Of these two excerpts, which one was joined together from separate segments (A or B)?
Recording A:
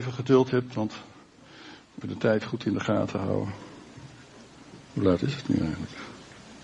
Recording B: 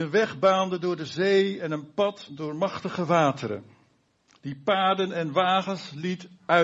A